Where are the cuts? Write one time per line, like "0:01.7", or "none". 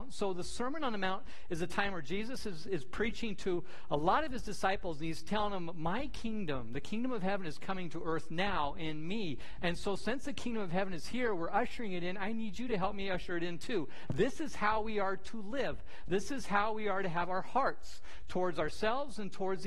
none